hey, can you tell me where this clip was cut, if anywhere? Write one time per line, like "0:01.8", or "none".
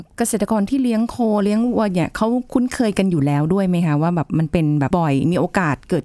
0:04.9